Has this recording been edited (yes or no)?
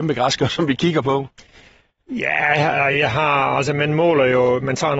no